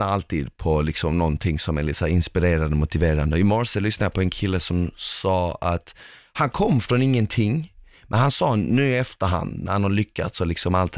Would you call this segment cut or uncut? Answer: uncut